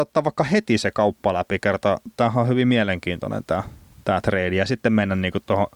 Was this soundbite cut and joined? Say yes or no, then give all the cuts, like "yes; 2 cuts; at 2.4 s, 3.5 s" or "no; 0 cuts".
no; 0 cuts